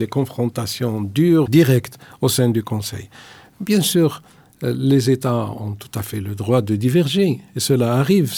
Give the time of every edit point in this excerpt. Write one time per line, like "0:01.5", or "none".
0:01.5